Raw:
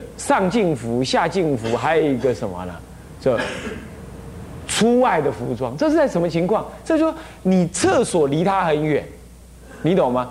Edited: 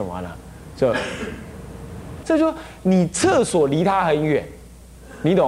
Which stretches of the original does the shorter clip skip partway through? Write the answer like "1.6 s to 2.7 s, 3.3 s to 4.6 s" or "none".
4.7 s to 6.8 s